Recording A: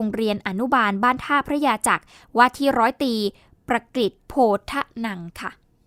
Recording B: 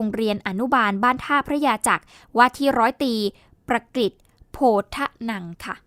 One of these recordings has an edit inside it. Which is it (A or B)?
A